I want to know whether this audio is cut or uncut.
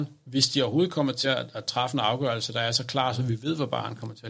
uncut